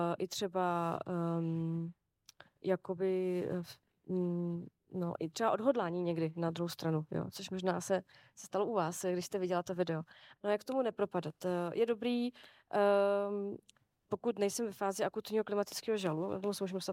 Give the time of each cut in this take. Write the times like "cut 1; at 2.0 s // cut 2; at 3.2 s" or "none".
cut 1; at 10.4 s